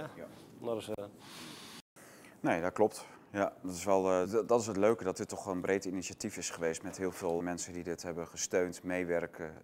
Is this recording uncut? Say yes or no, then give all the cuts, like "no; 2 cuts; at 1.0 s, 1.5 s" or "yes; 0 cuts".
no; 2 cuts; at 4.2 s, 7.4 s